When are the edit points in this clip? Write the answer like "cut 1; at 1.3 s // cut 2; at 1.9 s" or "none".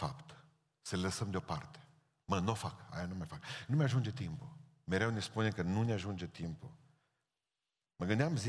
none